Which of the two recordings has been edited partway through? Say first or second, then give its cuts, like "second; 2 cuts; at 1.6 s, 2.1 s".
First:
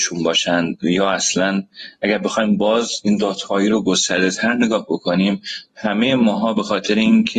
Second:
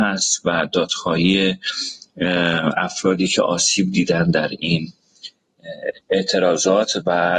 second; 1 cut; at 6.0 s